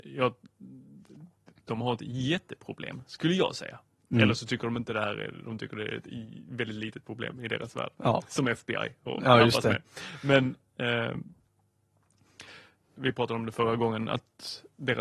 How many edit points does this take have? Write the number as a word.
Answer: two